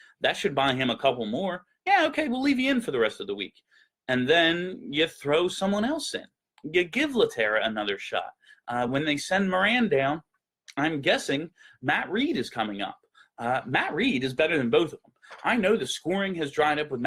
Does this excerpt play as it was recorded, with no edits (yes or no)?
yes